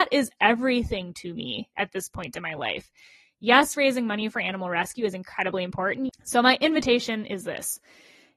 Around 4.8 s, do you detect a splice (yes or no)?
no